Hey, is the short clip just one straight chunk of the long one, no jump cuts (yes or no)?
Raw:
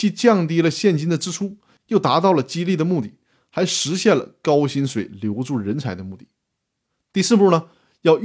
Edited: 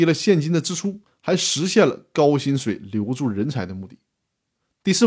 no